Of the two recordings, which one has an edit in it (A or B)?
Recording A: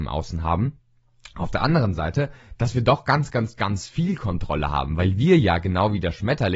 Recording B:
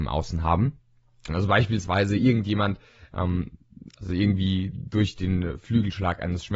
B